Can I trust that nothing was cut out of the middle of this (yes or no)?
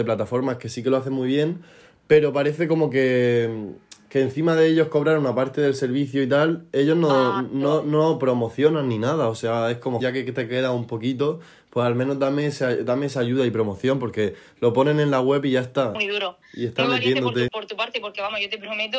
no